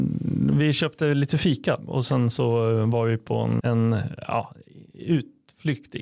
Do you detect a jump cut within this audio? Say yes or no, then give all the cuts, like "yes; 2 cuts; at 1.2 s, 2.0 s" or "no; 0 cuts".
yes; 1 cut; at 3.6 s